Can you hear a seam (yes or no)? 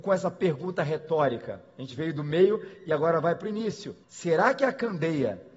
yes